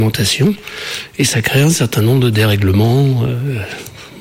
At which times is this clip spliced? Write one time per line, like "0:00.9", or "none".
none